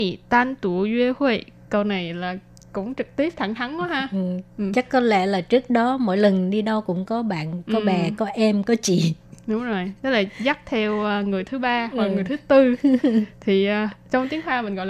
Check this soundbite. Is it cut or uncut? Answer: uncut